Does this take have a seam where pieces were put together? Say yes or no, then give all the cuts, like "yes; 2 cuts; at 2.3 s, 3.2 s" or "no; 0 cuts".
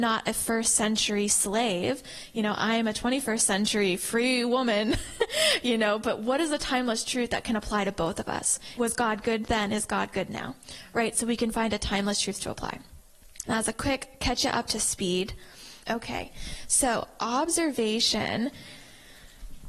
yes; 3 cuts; at 8.8 s, 13.4 s, 15.8 s